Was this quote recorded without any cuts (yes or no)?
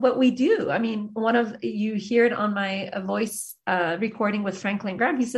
yes